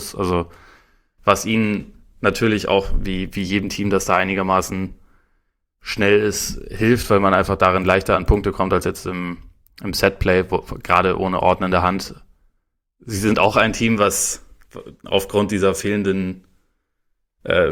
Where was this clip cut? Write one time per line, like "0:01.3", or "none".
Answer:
none